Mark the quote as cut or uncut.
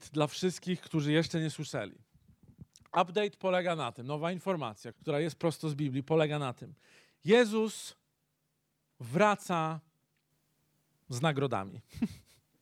cut